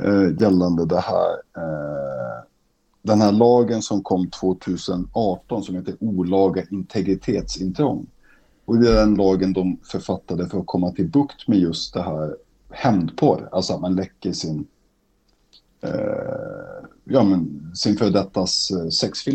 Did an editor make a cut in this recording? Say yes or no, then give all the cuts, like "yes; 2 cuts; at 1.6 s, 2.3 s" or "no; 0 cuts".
no; 0 cuts